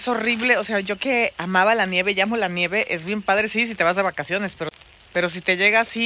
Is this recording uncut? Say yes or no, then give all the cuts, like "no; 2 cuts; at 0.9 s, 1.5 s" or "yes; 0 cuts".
yes; 0 cuts